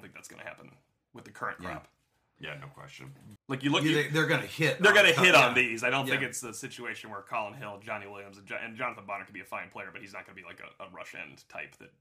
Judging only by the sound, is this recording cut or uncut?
cut